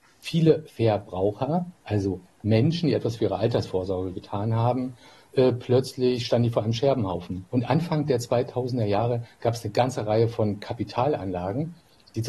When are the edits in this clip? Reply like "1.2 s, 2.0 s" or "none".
7.5 s